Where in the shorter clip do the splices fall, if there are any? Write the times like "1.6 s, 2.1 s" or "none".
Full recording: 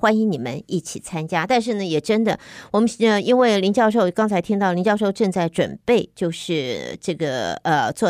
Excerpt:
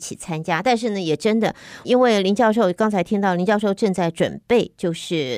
1.8 s